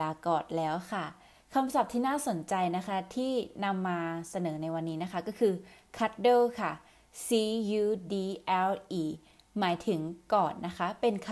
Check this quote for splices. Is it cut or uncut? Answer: cut